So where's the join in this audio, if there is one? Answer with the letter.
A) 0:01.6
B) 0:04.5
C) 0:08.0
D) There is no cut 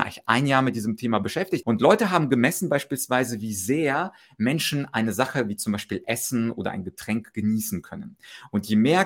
A